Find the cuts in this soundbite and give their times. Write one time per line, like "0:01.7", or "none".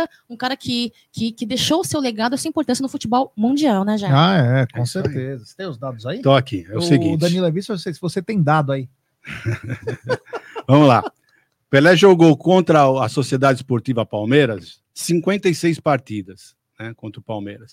0:01.3